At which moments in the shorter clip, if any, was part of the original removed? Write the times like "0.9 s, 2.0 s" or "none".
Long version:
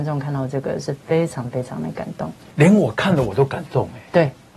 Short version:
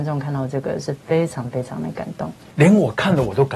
none